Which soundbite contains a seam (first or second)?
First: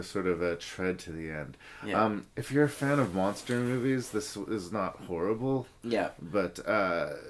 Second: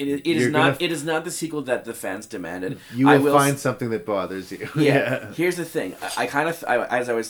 first